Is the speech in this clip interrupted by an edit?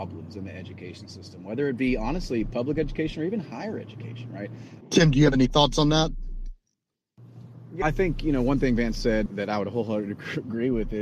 yes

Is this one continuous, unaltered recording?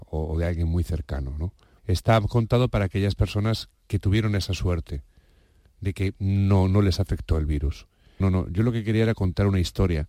no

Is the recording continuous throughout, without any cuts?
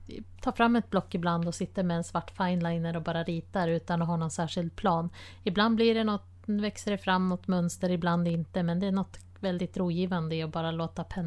yes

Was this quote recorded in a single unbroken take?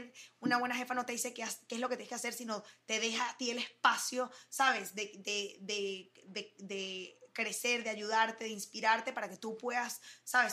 yes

